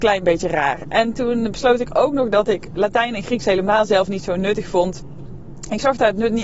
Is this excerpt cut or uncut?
uncut